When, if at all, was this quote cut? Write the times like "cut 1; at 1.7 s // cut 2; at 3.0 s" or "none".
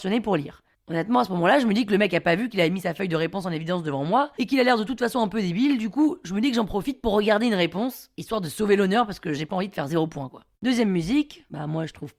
cut 1; at 10.6 s